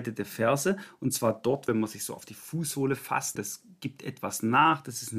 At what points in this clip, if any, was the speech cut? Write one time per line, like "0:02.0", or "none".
0:01.7
0:03.4